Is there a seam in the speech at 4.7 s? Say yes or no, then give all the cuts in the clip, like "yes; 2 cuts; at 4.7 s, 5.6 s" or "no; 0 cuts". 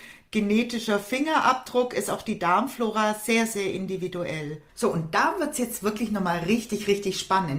yes; 1 cut; at 4.7 s